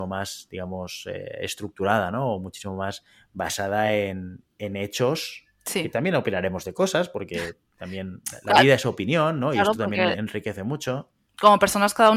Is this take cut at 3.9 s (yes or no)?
no